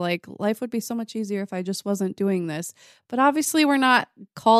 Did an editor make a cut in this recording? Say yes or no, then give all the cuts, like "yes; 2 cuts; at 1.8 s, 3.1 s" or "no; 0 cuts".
no; 0 cuts